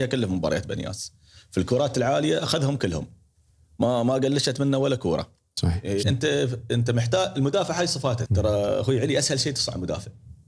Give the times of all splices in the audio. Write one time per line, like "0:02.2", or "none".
0:06.0
0:08.3